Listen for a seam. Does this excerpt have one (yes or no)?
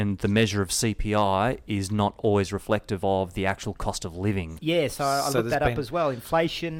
yes